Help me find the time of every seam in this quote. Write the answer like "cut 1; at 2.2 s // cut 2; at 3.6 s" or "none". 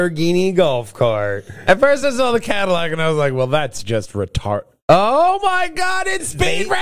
none